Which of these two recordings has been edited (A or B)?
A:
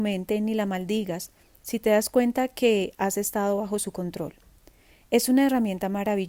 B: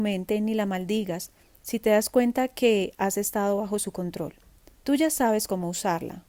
B